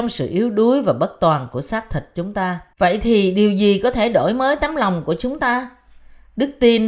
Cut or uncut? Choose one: cut